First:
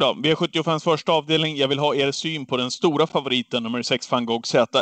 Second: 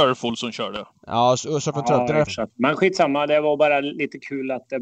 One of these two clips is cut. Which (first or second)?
second